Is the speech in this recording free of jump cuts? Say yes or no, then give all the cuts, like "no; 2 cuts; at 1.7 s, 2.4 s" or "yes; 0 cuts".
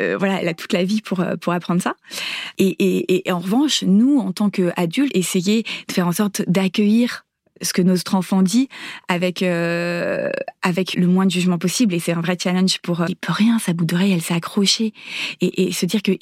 no; 3 cuts; at 5.1 s, 10.9 s, 13.1 s